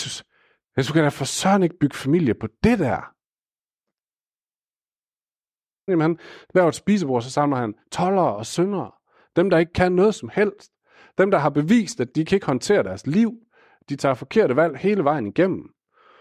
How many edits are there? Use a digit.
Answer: 1